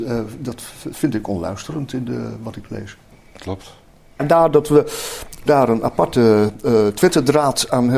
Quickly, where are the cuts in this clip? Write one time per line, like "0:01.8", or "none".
0:04.2
0:05.5

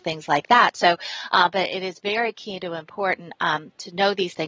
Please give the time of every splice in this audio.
none

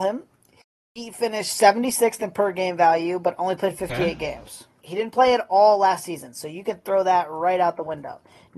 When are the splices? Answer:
0:04.8

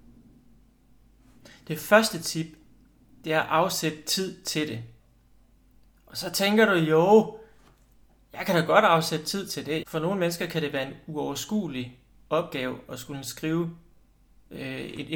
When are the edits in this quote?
0:09.8

